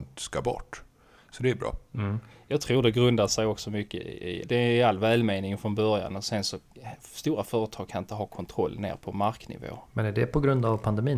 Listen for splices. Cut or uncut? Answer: cut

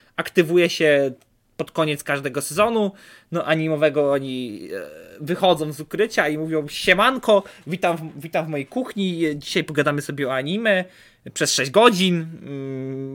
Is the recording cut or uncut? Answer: uncut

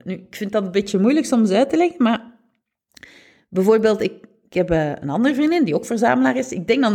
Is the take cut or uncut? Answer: uncut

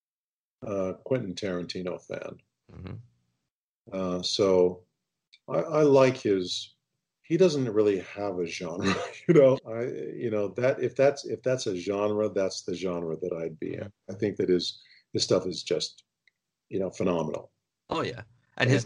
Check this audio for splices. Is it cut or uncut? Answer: cut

